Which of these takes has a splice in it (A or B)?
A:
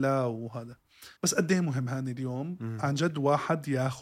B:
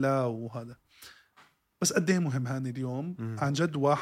A